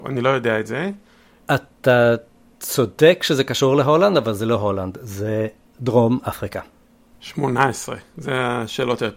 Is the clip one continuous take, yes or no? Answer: no